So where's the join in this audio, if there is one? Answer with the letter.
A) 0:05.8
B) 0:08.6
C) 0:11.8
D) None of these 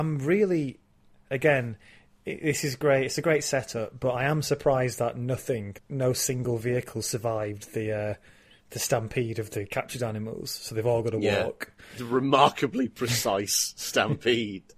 A